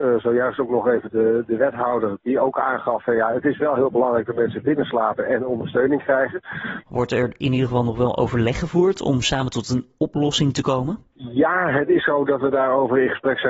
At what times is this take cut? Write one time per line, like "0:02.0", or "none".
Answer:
0:01.1
0:06.8